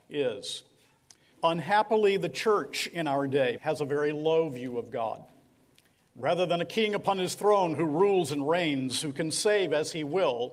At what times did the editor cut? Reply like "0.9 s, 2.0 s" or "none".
1.3 s, 3.6 s